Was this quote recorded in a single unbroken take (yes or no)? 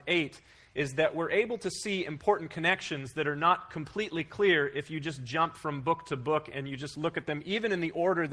yes